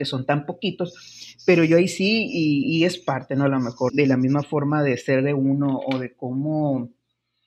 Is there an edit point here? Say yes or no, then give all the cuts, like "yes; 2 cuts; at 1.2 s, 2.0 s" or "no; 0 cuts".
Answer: yes; 1 cut; at 3.9 s